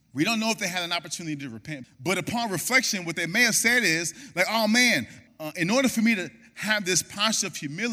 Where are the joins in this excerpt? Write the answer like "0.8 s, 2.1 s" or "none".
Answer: 1.8 s, 5.3 s